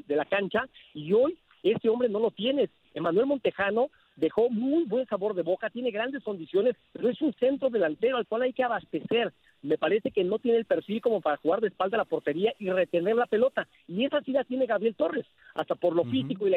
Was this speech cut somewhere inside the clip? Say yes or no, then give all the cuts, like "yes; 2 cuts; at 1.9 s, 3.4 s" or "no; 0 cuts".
no; 0 cuts